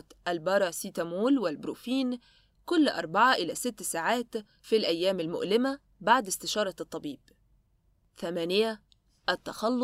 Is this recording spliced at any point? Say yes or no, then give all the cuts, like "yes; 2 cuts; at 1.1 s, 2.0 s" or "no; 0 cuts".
no; 0 cuts